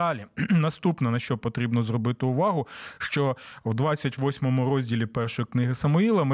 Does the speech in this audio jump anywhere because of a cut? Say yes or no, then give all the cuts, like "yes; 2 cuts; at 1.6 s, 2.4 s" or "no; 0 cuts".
no; 0 cuts